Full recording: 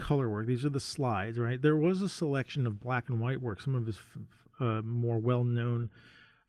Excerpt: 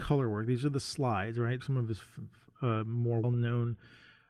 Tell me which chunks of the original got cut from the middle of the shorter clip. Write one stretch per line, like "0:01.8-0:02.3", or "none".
0:01.6-0:03.6
0:05.2-0:05.4